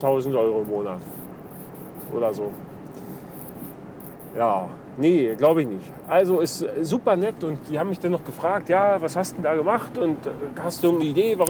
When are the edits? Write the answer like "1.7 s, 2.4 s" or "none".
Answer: none